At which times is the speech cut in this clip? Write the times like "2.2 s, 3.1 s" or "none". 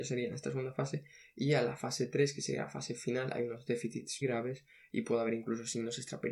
4.2 s